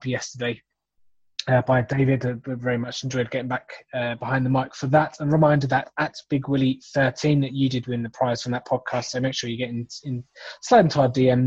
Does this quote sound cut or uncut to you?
uncut